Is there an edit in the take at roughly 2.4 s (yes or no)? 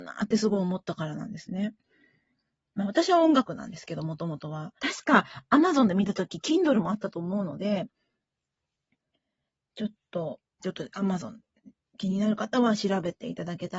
no